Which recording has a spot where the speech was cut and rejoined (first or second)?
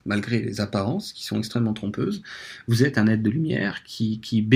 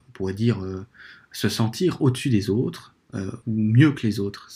second